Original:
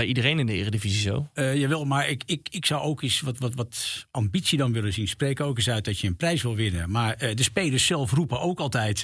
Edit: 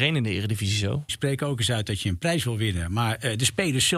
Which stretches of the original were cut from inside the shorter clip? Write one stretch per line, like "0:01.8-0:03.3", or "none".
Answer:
0:01.3-0:05.1